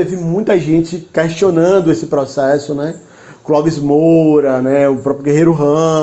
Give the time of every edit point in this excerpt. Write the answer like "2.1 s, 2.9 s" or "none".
none